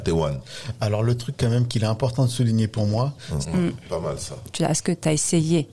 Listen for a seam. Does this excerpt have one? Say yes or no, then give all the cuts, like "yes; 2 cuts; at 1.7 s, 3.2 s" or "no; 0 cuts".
yes; 2 cuts; at 3.4 s, 4.5 s